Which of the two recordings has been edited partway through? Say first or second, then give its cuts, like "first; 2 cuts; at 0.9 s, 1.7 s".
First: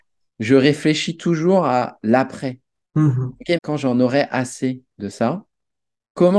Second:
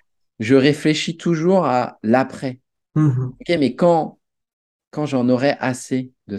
first; 1 cut; at 3.6 s